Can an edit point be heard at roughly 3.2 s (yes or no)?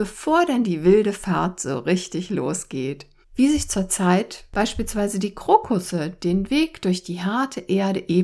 yes